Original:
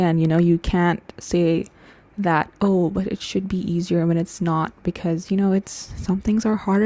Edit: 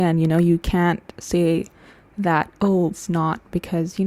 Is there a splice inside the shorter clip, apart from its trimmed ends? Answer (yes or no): yes